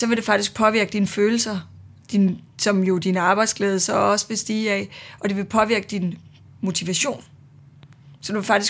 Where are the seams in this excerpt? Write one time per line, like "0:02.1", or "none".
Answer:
none